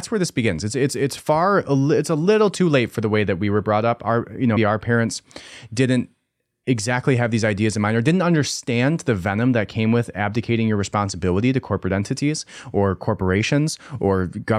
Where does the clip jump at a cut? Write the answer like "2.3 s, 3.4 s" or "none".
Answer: 4.6 s